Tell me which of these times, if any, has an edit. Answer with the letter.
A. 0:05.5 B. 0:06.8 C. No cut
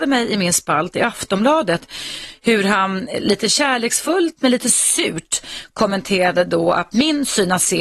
C